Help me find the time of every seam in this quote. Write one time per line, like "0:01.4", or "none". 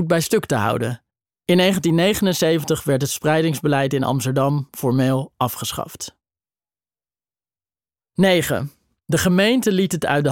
0:01.3